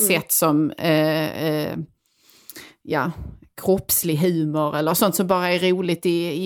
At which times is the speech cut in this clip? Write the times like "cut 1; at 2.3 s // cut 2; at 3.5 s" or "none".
none